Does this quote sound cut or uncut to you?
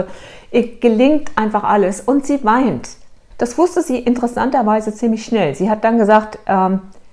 cut